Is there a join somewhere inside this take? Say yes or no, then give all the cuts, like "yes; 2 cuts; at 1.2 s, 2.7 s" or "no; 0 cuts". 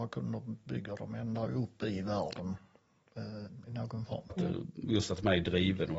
yes; 1 cut; at 4.3 s